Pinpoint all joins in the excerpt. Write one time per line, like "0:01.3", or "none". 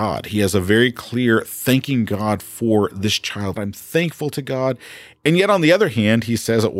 0:03.6